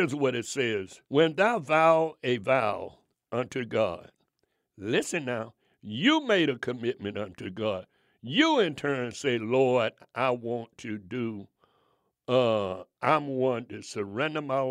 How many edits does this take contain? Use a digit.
1